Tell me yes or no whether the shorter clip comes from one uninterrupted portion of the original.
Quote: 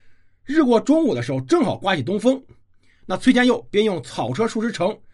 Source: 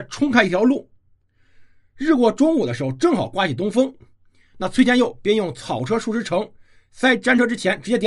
yes